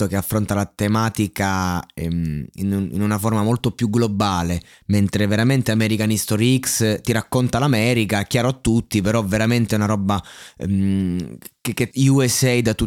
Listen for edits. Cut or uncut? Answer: cut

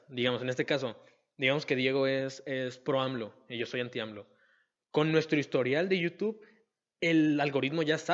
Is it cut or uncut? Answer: uncut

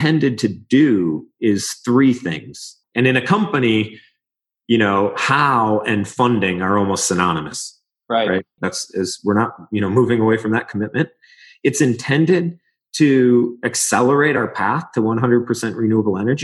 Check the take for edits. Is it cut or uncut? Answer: cut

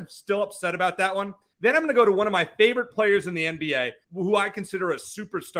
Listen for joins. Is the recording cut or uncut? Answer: cut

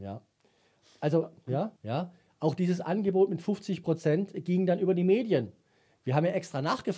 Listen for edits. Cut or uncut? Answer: cut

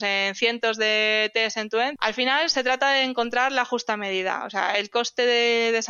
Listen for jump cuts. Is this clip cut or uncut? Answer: cut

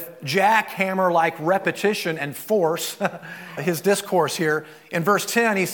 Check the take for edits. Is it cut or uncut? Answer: cut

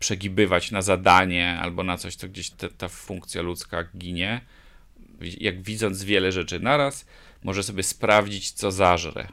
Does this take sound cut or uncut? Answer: cut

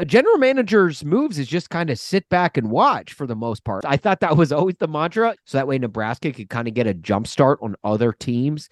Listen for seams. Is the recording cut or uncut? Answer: cut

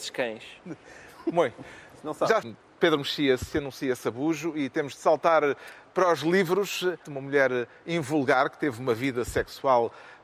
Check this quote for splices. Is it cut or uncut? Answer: cut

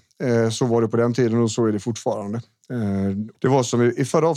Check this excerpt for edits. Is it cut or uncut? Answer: cut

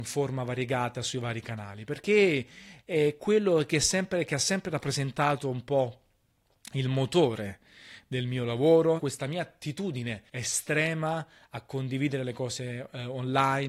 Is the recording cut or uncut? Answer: cut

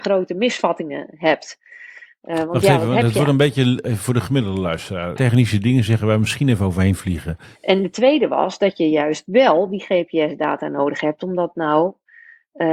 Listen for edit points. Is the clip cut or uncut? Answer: cut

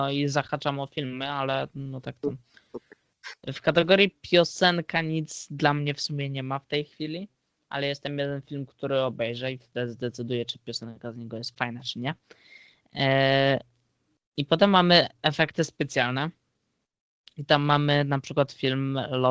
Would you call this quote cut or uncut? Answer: uncut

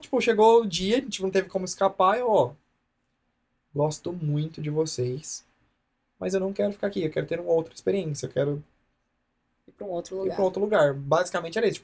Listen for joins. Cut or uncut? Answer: uncut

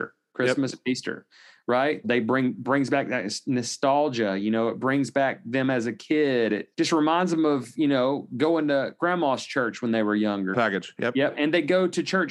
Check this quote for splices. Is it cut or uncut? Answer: cut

